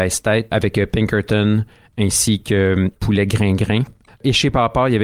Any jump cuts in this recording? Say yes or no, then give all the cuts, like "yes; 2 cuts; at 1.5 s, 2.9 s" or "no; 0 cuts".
no; 0 cuts